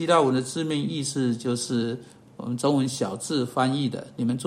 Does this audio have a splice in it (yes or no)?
no